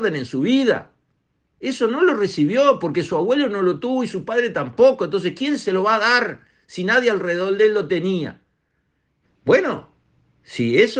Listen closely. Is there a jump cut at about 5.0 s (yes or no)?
no